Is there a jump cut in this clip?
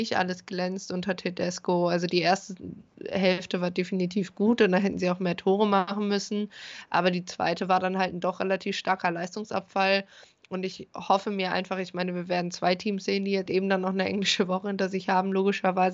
yes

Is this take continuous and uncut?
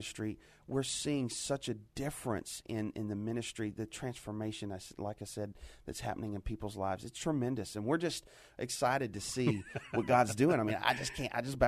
yes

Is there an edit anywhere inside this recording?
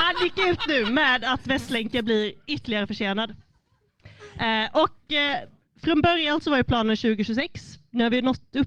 no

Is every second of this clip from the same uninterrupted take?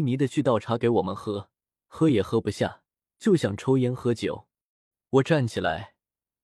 yes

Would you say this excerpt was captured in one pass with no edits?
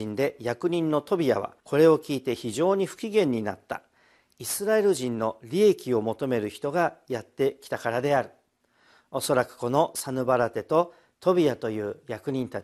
no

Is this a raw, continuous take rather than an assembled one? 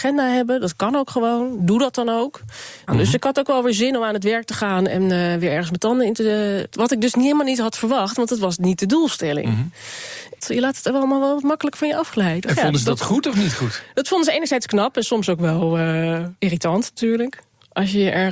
no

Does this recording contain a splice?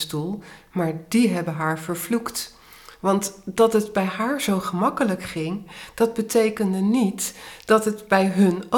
no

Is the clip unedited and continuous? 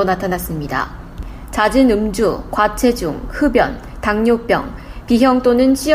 yes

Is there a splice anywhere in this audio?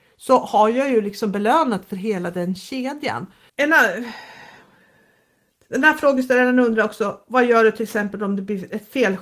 yes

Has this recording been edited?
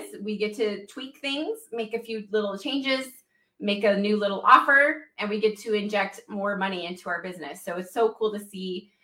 no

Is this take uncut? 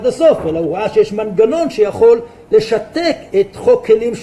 no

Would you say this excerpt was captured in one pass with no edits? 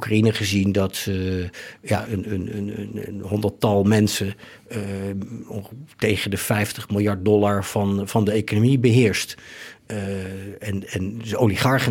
no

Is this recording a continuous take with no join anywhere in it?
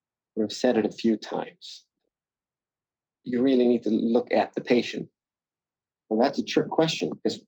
no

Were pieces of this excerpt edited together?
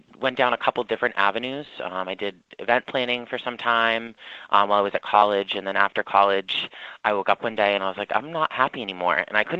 no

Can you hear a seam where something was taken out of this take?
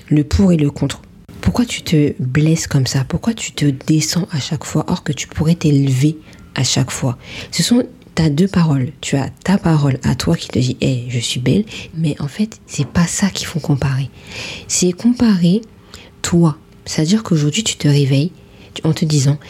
yes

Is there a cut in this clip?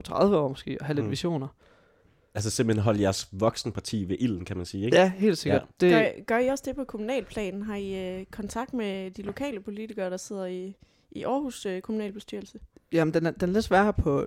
no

